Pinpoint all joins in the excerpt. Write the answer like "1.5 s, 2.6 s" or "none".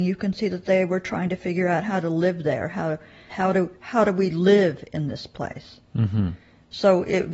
3.3 s